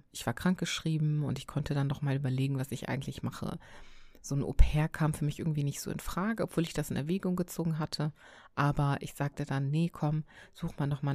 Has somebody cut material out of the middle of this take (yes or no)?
no